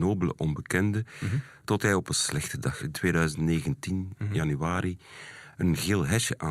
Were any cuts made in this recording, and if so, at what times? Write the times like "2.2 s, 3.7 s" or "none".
none